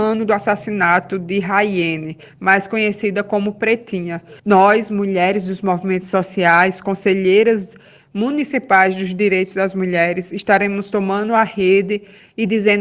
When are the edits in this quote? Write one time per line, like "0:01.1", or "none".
0:04.4